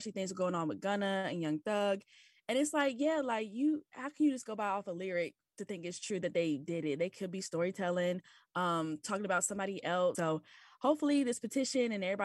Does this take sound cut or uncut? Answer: cut